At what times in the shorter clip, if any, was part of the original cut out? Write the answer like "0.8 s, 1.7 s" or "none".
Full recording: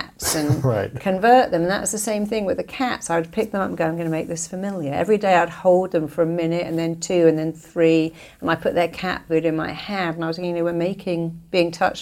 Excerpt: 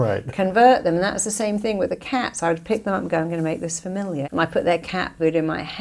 4.2 s